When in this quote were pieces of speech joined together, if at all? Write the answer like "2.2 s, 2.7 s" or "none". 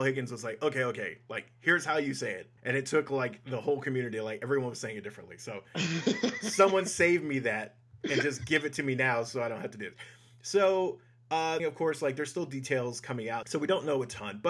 2.6 s, 11.6 s, 13.4 s